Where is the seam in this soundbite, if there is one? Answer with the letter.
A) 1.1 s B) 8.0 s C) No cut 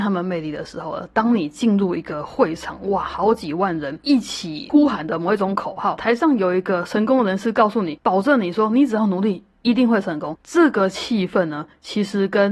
C